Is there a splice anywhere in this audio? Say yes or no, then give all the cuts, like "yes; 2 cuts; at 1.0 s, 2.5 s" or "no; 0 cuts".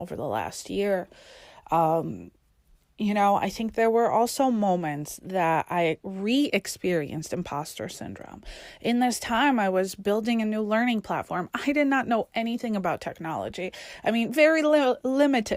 no; 0 cuts